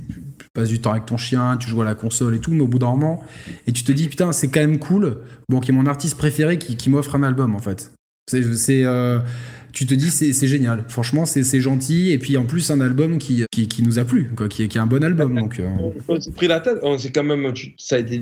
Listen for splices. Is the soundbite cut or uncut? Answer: cut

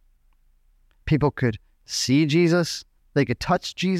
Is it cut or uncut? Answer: cut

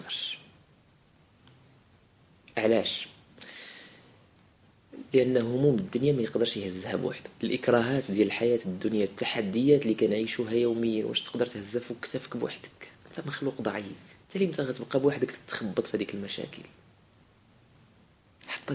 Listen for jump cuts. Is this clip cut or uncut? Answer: cut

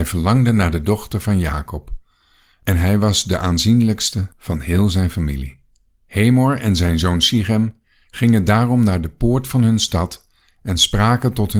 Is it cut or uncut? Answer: uncut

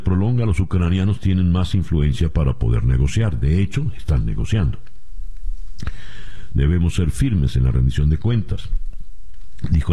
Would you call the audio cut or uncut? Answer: cut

